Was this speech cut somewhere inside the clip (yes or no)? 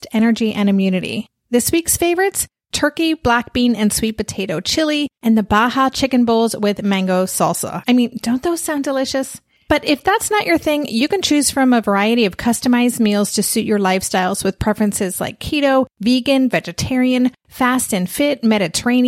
no